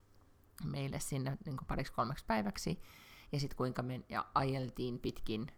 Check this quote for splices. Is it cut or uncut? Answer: uncut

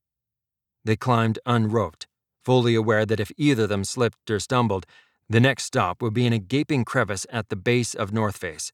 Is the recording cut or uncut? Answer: uncut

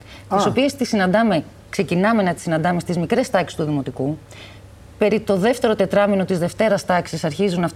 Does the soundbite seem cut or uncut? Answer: uncut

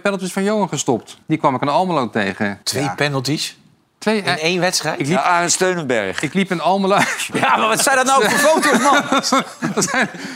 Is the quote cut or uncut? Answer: cut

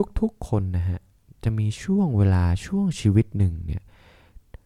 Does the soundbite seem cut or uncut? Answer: uncut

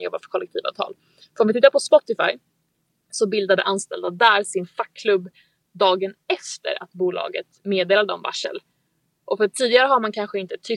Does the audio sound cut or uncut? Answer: uncut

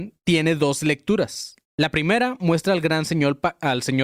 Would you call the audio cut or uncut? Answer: cut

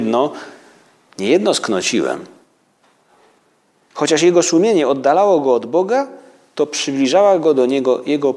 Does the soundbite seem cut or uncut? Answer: uncut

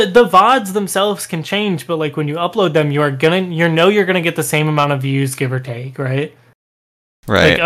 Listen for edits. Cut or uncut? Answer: uncut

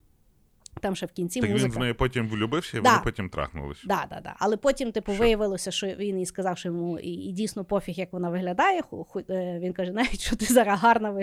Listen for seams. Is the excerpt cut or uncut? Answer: uncut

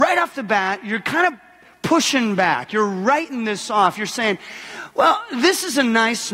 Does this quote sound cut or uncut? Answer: uncut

